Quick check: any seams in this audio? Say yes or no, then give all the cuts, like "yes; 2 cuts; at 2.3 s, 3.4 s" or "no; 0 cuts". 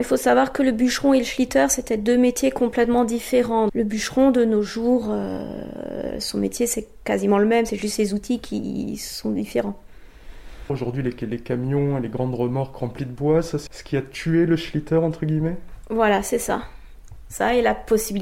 yes; 3 cuts; at 3.7 s, 10.7 s, 13.7 s